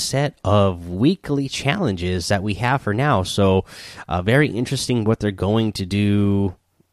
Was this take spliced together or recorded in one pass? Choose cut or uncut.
uncut